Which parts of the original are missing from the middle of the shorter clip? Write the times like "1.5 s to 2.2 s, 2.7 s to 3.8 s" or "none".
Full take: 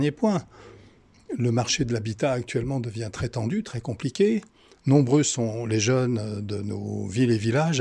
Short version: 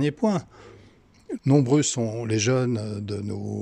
1.4 s to 4.8 s